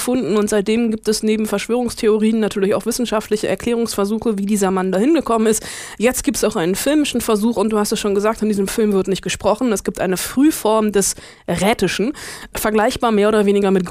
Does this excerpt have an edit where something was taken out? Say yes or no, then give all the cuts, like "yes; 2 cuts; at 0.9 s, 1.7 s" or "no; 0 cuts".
no; 0 cuts